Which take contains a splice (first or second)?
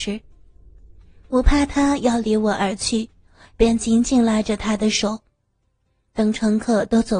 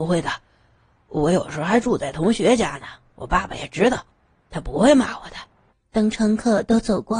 second